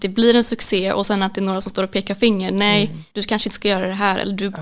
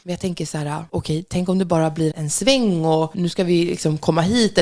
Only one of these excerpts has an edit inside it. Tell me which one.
second; 2 cuts; at 2.1 s, 3.1 s

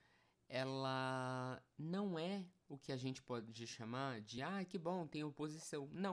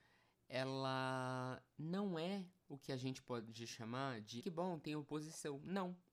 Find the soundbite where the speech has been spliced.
second; 1 cut; at 4.4 s

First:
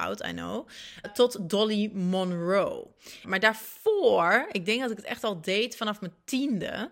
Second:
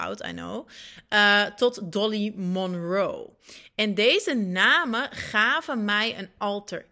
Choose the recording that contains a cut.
first; 2 cuts; at 1.0 s, 3.2 s

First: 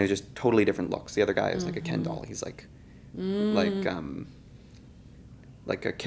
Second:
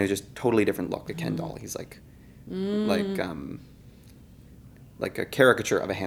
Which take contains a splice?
second; 1 cut; at 1.1 s

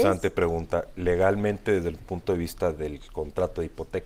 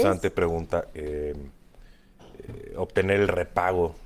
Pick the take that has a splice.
second; 1 cut; at 0.9 s

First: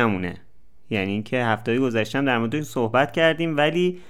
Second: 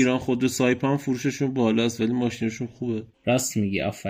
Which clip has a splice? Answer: second; 1 cut; at 3.1 s

